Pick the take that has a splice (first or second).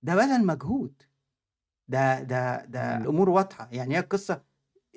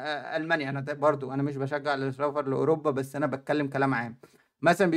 first